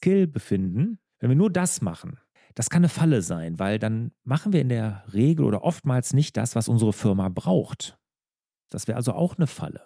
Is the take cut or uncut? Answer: cut